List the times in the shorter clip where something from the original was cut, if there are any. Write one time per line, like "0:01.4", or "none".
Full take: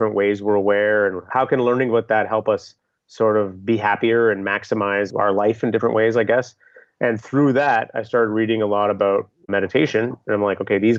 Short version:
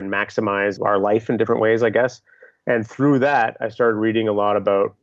none